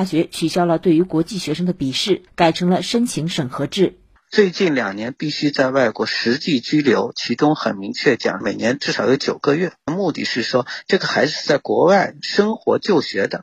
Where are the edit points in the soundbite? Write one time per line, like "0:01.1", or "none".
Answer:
0:04.2